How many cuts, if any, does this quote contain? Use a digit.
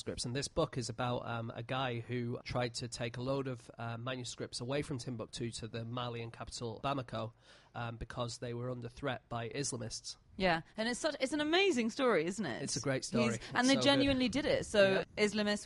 0